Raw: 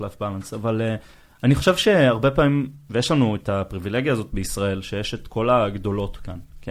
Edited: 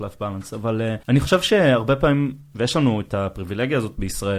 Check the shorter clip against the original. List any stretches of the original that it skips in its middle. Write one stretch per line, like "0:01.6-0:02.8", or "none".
0:01.0-0:01.4